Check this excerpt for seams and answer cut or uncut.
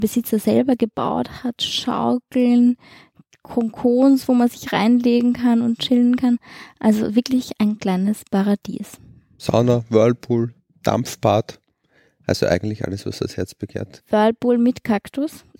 uncut